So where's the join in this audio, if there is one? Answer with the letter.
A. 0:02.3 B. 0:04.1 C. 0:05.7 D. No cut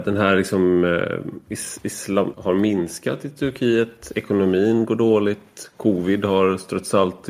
A